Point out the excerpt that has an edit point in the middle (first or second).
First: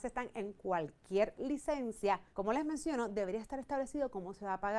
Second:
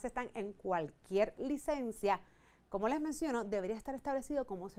first